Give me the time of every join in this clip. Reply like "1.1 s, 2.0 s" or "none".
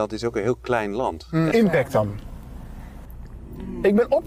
1.5 s